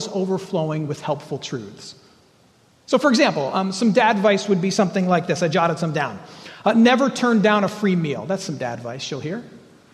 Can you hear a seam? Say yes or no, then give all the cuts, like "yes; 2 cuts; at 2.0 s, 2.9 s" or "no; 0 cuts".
no; 0 cuts